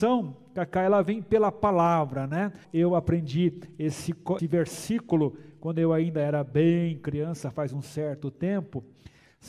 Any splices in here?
yes; 2 cuts; at 2.6 s, 4.4 s

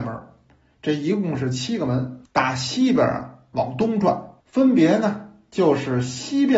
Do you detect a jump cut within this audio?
yes; 2 cuts; at 2.2 s, 4.4 s

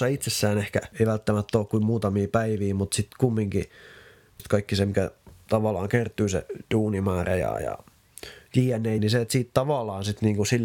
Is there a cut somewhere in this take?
yes; 2 cuts; at 4.4 s, 9.0 s

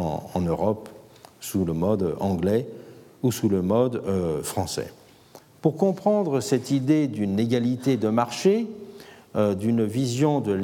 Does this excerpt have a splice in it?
no; 0 cuts

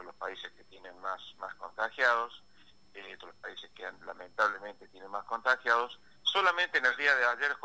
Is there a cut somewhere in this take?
no; 0 cuts

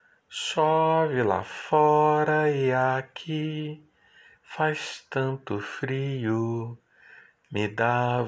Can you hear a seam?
no; 0 cuts

